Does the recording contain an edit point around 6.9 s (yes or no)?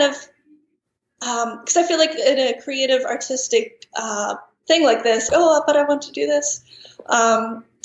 no